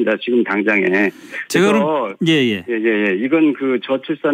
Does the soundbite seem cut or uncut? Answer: uncut